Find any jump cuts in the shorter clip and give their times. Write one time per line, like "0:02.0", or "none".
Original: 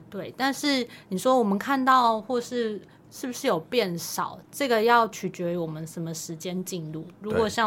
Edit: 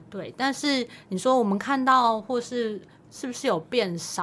none